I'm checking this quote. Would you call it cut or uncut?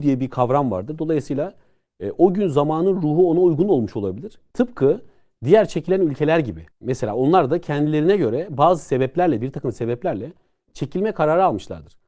cut